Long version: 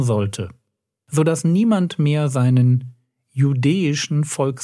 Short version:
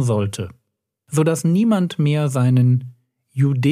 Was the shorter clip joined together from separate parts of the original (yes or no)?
no